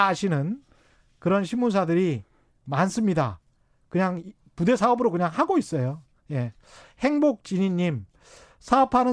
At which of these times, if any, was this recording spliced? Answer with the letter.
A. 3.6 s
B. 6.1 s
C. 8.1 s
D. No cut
D